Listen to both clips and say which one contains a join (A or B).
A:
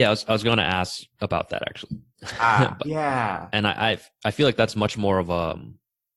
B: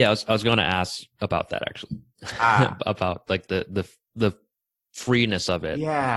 A